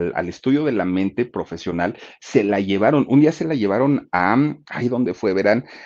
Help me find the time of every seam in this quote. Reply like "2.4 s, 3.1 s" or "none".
none